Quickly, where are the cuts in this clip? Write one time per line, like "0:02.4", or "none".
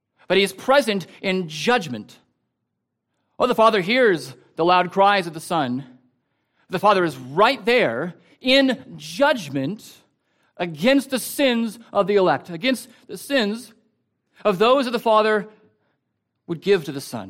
none